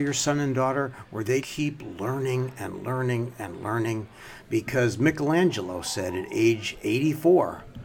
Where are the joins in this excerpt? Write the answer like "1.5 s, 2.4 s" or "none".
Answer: 1.4 s